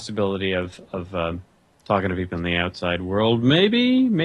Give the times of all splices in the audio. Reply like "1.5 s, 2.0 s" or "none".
none